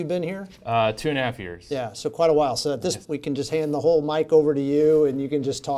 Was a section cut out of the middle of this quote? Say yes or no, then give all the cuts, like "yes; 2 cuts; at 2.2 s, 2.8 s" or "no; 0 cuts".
yes; 1 cut; at 3.0 s